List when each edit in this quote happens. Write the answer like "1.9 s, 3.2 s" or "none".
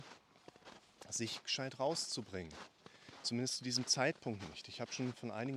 none